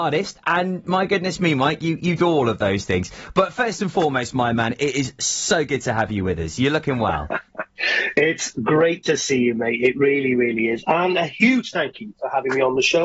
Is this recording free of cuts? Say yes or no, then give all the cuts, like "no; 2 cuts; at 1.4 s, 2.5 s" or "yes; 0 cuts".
yes; 0 cuts